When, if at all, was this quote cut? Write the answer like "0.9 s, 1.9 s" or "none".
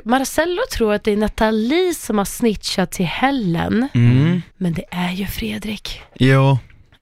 4.5 s